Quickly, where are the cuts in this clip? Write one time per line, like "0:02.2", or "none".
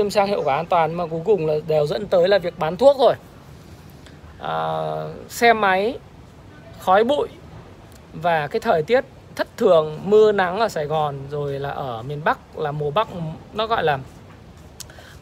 0:04.3